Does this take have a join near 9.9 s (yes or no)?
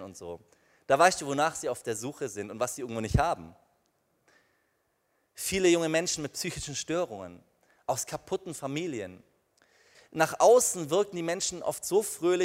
yes